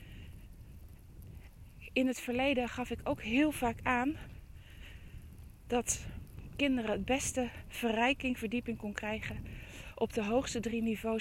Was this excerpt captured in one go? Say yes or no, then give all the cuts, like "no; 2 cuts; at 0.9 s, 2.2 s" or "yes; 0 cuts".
yes; 0 cuts